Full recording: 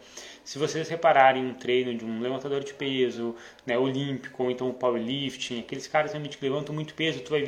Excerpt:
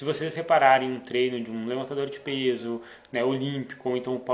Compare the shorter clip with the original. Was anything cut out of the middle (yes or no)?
no